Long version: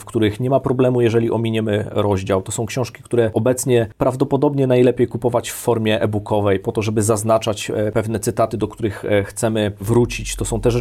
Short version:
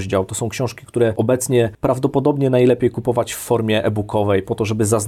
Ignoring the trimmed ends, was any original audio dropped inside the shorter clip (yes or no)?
no